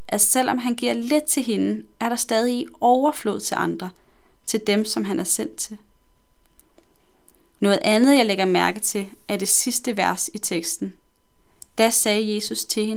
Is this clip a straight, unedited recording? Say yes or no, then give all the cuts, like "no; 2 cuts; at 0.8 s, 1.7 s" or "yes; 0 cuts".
yes; 0 cuts